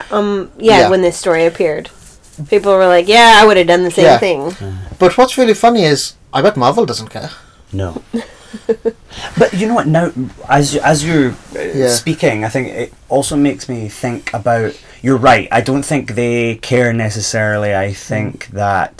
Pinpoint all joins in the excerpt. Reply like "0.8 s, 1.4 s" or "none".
none